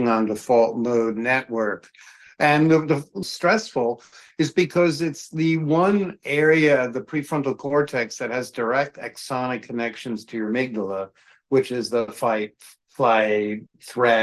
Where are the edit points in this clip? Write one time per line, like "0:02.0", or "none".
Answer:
0:03.2